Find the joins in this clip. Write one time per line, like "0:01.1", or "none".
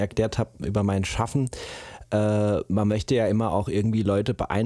none